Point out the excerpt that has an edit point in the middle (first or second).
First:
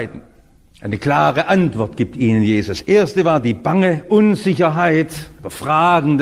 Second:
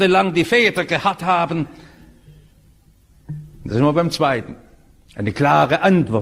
second